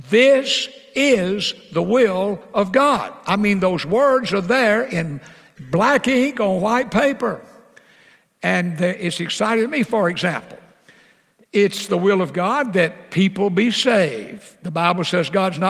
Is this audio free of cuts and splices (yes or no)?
yes